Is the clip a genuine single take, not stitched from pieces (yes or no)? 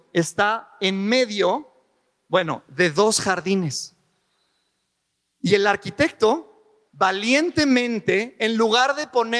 yes